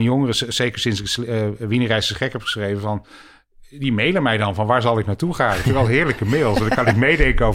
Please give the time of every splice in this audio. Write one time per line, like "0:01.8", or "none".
none